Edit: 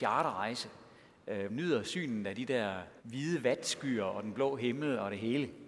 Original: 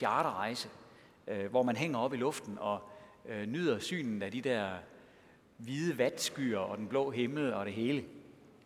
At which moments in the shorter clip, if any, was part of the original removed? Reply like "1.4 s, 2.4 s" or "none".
1.5 s, 3.0 s

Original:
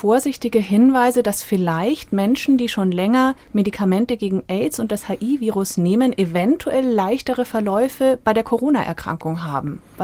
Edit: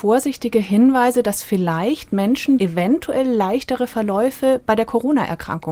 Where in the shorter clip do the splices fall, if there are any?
2.6 s

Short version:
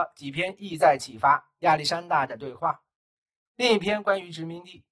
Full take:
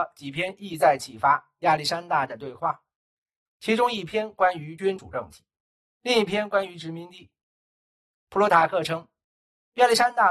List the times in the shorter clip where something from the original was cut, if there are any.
3.5 s

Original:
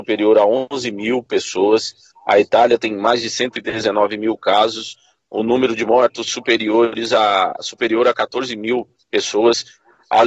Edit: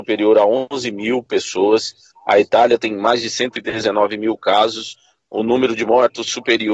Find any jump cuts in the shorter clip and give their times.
none

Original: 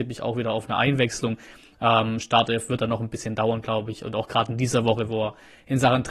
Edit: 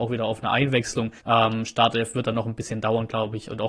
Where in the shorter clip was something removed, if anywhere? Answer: 1.2 s

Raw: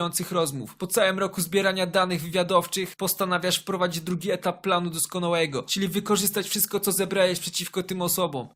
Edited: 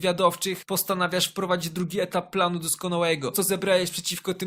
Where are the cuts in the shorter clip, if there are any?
3.3 s

